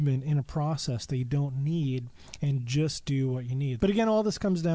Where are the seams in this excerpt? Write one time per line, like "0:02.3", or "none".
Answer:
0:03.8

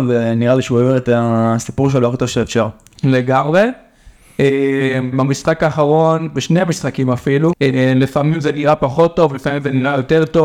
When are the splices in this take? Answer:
0:05.1
0:07.5

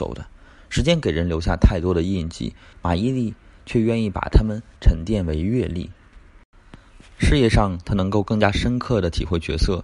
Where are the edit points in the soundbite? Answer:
0:02.7

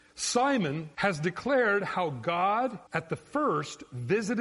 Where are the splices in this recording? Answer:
0:00.9
0:02.9

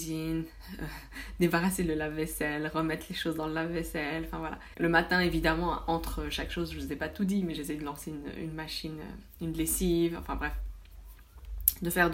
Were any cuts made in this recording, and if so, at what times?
none

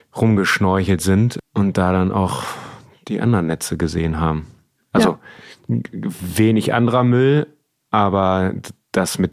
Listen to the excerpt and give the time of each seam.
none

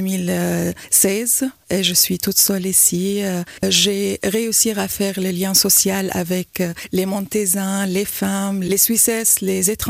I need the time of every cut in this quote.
0:03.6

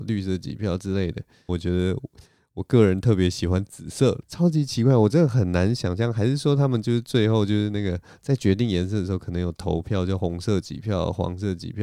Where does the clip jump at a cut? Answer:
0:01.5
0:04.2

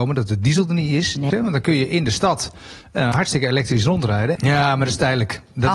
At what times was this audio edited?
0:01.3
0:04.4

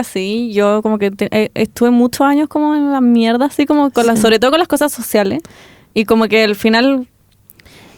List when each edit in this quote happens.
none

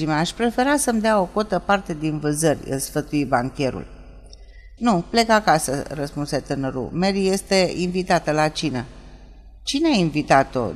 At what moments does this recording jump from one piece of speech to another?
0:04.8

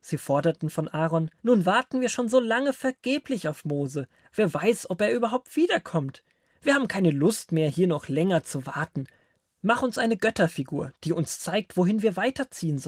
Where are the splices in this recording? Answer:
0:01.4

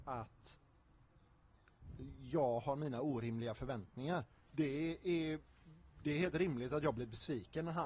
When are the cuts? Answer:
0:04.5

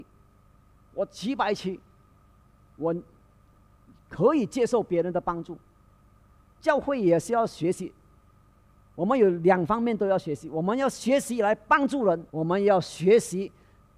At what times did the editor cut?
0:12.3

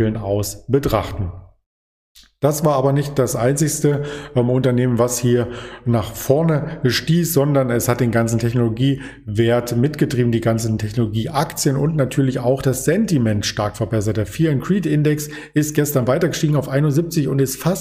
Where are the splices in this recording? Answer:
none

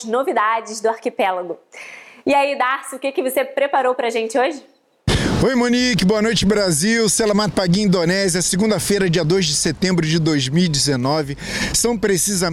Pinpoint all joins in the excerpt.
none

